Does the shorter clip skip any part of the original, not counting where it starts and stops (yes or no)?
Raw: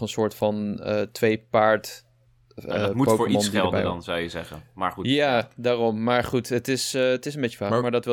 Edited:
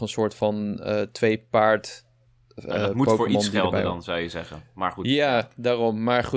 no